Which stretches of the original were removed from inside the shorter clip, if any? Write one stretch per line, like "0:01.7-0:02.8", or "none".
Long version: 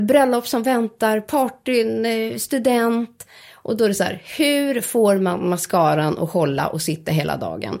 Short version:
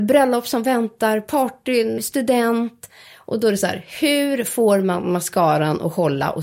0:02.0-0:02.3